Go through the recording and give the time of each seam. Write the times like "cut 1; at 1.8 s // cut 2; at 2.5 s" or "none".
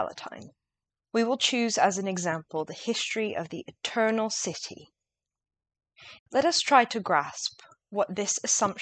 cut 1; at 1.0 s // cut 2; at 6.2 s